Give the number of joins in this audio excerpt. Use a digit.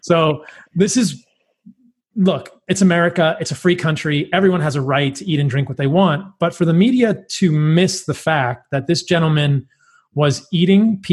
0